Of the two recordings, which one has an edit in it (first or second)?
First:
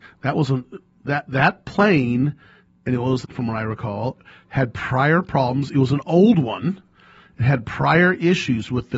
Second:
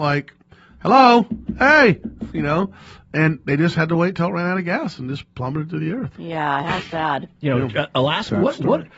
first